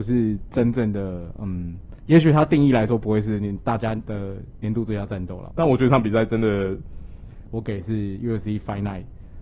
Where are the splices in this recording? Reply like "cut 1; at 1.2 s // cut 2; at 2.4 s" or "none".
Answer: cut 1; at 5.5 s // cut 2; at 7.5 s